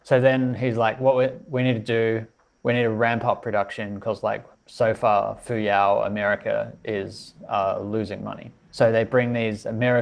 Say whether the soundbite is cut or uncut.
uncut